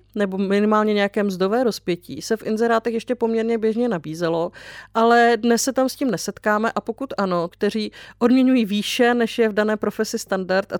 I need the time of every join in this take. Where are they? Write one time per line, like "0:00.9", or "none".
0:07.5